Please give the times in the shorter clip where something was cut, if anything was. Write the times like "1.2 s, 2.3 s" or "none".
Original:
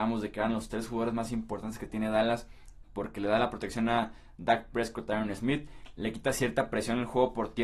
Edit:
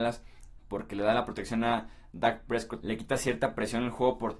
2.8 s

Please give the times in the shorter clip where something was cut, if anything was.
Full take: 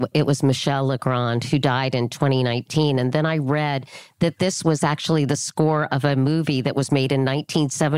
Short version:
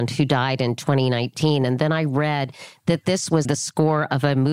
3.4 s

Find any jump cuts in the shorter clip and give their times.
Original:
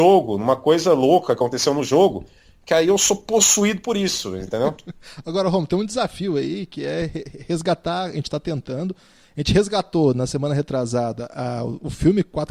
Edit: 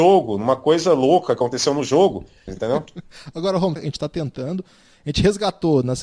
2.5 s, 3.8 s

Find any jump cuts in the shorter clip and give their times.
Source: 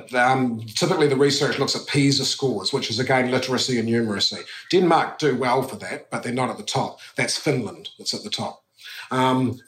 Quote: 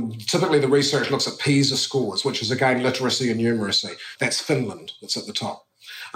4.2 s

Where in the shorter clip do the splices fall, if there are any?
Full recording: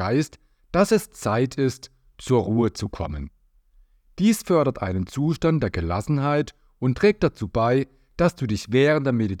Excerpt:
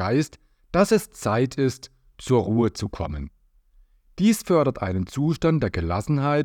none

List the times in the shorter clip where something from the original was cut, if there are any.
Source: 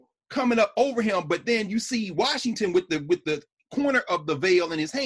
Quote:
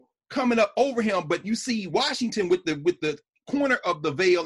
1.4 s

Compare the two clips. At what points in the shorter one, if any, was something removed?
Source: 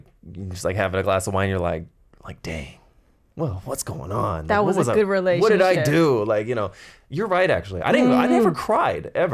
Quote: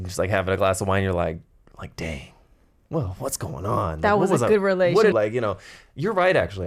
5.1 s

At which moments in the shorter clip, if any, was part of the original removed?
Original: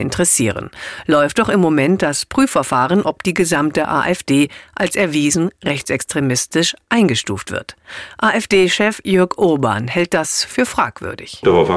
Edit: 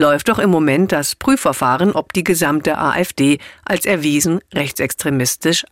none

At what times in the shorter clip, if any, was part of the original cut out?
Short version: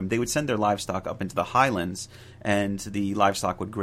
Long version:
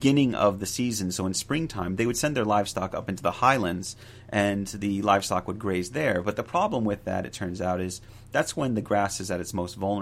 none

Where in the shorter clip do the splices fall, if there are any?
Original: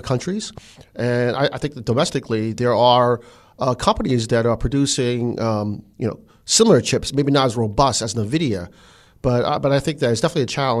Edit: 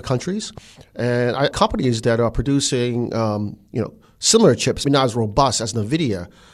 1.5 s, 4.8 s

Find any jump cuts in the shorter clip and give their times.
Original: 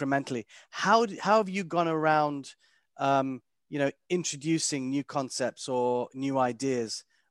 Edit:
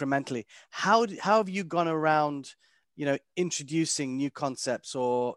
2.8 s

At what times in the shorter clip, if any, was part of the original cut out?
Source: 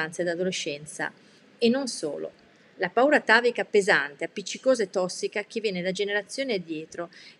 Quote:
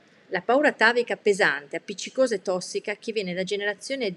none

